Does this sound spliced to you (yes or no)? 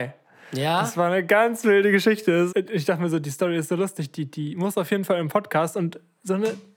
yes